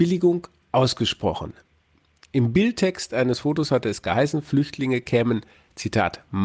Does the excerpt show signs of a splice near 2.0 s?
no; 0 cuts

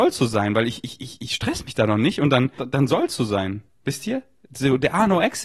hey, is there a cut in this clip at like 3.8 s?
no; 1 cut; at 2.6 s

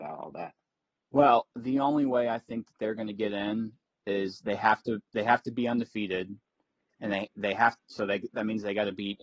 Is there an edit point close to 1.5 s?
yes; 1 cut; at 1.5 s

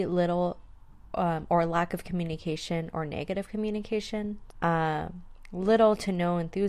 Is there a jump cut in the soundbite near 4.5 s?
yes; 1 cut; at 4.5 s

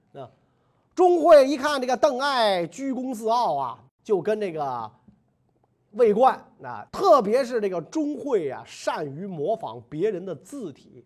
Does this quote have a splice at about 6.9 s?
yes; 2 cuts; at 3.9 s, 6.9 s

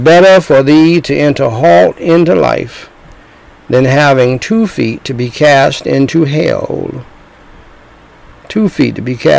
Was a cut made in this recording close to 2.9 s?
no; 0 cuts

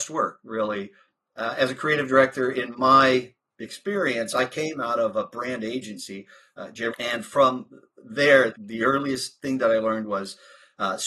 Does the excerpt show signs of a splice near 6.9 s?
yes; 2 cuts; at 6.9 s, 8.5 s

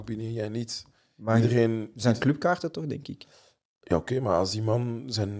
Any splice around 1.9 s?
no; 0 cuts

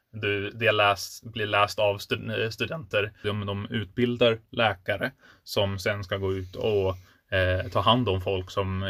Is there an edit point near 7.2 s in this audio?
no; 1 cut; at 3.2 s

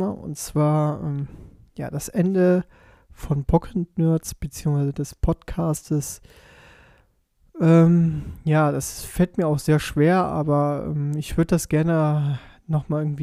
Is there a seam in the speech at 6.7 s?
no; 0 cuts

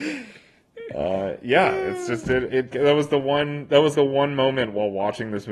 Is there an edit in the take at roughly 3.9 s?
yes; 2 cuts; at 2.7 s, 3.9 s

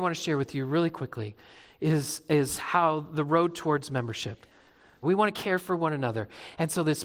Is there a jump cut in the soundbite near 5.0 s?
yes; 1 cut; at 5.0 s

